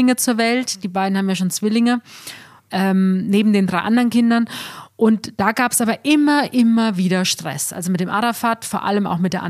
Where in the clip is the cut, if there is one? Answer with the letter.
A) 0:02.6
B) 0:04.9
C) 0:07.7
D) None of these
D